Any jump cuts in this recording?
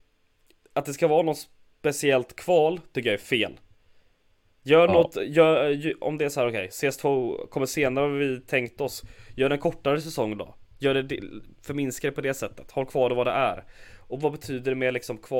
no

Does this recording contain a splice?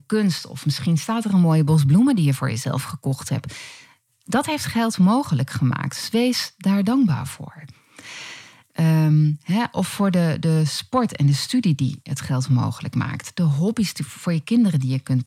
yes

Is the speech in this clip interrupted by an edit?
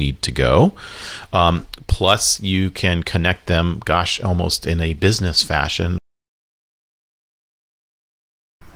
no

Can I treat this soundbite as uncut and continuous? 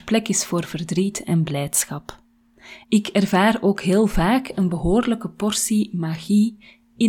no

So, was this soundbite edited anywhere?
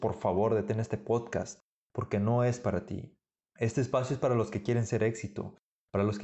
no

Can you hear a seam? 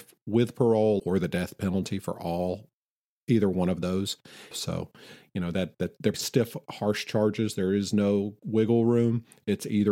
yes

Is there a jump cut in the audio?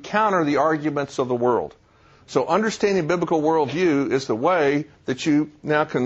no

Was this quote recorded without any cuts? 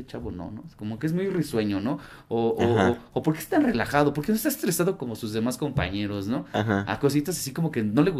yes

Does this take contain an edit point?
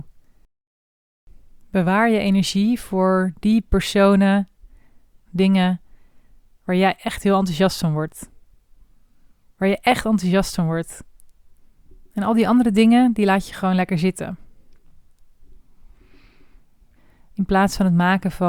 yes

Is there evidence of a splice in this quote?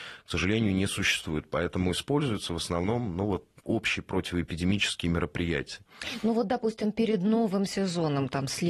no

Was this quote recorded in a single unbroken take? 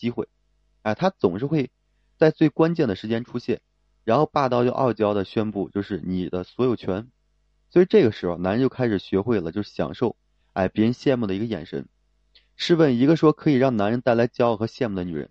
yes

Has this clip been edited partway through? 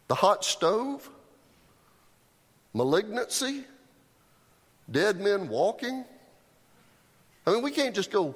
yes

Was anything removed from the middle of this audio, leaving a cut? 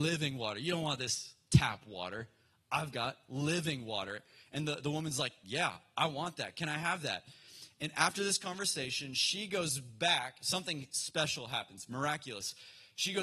no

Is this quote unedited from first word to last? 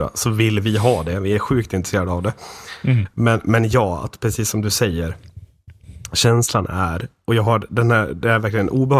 yes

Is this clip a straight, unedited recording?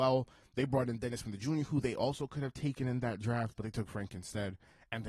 yes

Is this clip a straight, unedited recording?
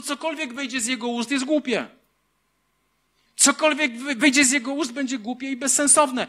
yes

